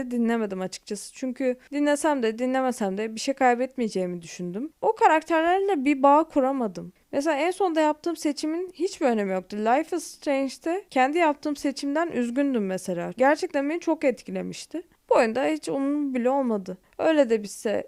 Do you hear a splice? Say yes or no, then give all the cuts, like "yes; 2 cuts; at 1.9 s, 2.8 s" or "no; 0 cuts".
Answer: no; 0 cuts